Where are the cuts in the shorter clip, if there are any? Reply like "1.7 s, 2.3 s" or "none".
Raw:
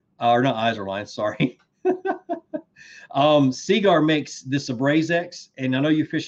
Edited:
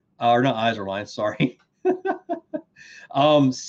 none